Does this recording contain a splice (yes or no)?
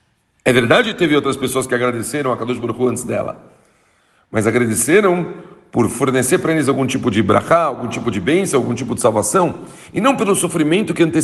no